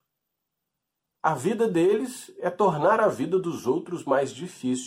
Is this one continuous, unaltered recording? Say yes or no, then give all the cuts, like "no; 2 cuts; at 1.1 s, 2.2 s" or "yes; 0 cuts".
yes; 0 cuts